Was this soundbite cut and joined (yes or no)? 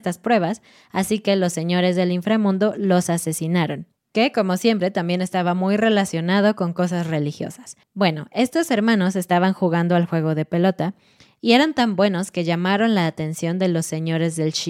yes